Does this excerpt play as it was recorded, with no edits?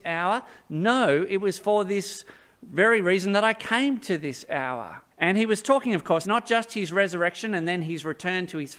no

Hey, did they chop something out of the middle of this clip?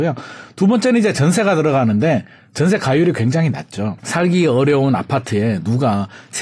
yes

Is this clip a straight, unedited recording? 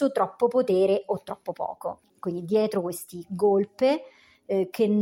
no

